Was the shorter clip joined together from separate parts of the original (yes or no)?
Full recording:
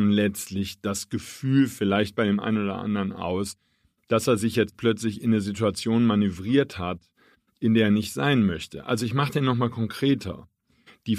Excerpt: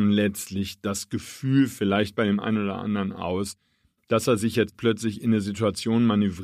no